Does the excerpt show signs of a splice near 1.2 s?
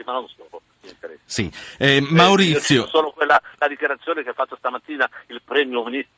no; 0 cuts

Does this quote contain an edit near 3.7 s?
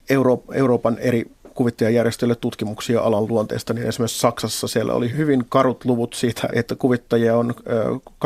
no; 2 cuts; at 5.1 s, 6.5 s

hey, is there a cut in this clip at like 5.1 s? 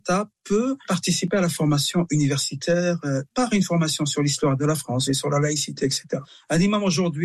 yes; 1 cut; at 5.1 s

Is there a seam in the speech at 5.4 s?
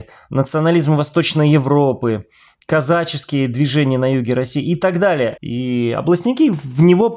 yes; 1 cut; at 5.4 s

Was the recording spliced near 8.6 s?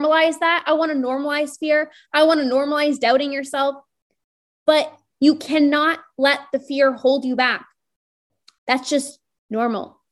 yes; 1 cut; at 8.6 s

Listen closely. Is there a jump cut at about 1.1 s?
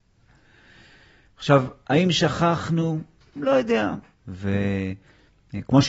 no; 1 cut; at 4.1 s

